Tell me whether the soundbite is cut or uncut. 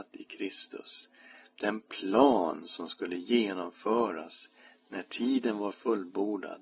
uncut